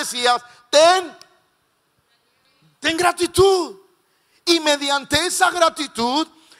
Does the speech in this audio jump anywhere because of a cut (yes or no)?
no